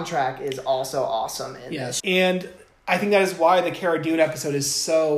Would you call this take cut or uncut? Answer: cut